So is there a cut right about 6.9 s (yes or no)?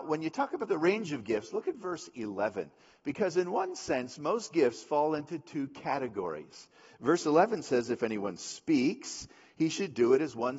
no